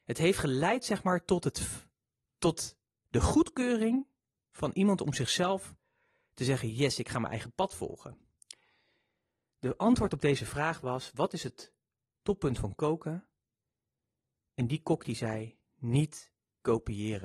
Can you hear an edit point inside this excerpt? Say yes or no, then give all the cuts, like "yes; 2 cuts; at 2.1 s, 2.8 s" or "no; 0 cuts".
no; 0 cuts